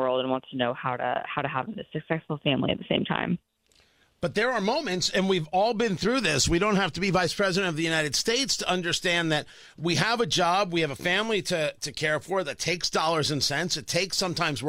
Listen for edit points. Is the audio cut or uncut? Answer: uncut